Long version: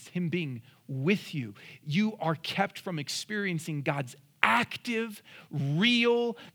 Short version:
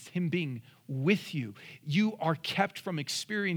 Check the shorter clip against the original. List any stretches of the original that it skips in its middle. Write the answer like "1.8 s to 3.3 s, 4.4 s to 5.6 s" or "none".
none